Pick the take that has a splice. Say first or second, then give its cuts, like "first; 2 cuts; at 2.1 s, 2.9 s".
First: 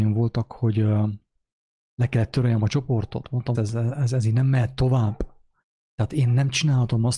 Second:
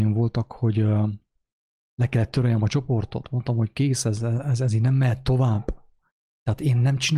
first; 1 cut; at 3.5 s